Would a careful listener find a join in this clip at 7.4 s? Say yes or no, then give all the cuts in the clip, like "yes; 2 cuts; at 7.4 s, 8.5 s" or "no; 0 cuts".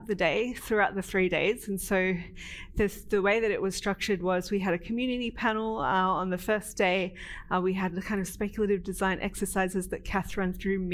no; 0 cuts